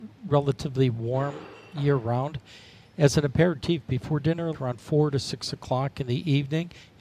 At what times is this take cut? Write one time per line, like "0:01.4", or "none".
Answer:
0:04.5